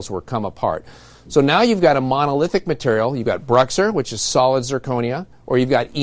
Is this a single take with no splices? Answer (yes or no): yes